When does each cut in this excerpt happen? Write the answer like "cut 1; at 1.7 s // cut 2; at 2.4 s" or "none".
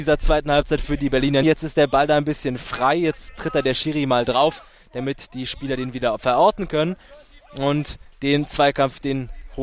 cut 1; at 1.4 s